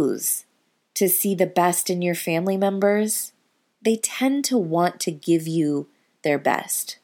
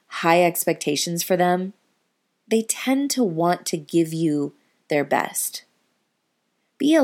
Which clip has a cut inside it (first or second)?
first